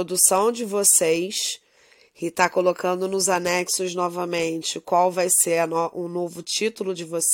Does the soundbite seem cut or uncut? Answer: uncut